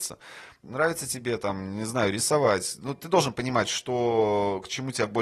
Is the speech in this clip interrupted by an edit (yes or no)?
no